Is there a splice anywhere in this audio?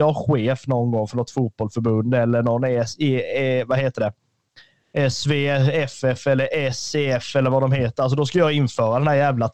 no; 0 cuts

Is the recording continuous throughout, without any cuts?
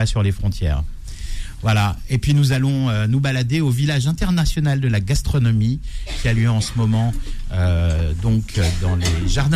yes; 0 cuts

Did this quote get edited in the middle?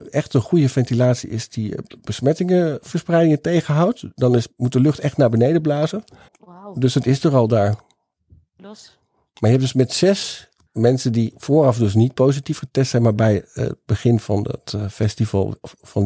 yes; 2 cuts; at 6.3 s, 8.6 s

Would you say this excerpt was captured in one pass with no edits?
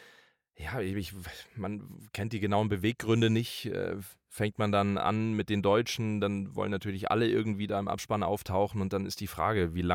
yes; 0 cuts

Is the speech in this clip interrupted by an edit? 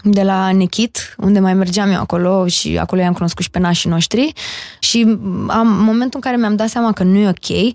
yes; 1 cut; at 4.8 s

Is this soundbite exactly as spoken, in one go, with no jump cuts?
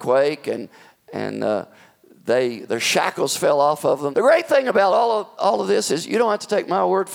no; 2 cuts; at 4.1 s, 5.4 s

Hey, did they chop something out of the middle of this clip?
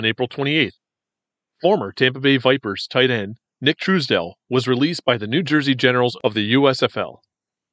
no; 0 cuts

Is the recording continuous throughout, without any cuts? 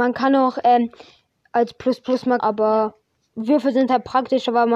no; 1 cut; at 2.4 s

